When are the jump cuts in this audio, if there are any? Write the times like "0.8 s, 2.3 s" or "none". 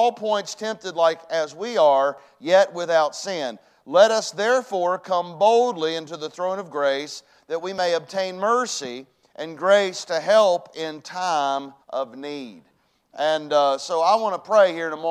11.8 s